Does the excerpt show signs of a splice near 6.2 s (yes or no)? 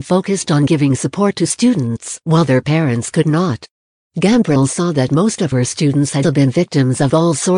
yes